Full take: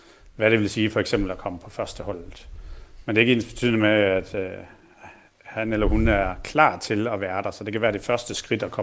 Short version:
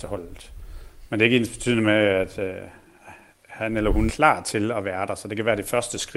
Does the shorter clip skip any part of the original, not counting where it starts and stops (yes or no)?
yes